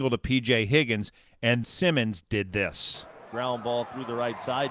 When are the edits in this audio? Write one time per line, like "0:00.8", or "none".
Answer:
0:01.6
0:03.3